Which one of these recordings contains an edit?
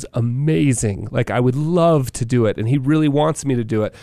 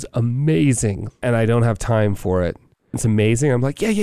second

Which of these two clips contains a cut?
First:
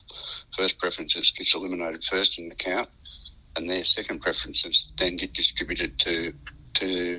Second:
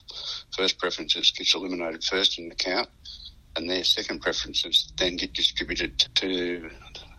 second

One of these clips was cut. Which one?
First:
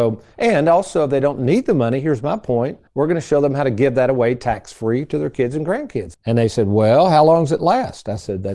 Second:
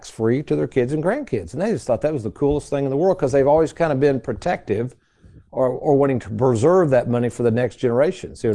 first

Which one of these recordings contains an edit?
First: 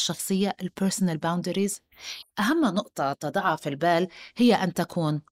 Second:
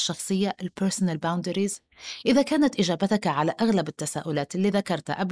first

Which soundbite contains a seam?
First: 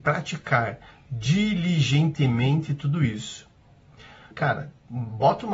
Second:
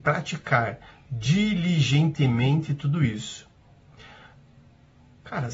first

